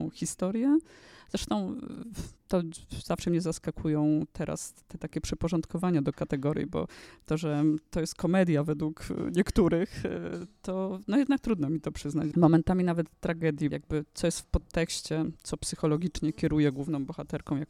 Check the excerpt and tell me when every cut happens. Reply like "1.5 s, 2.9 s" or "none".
12.3 s, 13.7 s